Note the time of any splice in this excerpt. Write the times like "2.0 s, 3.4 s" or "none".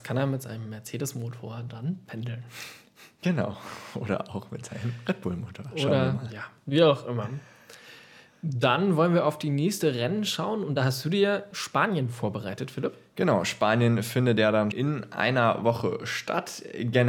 11.5 s, 14.7 s